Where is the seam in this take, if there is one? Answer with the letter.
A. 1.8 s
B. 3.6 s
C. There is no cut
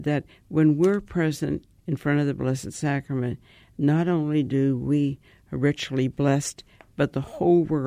A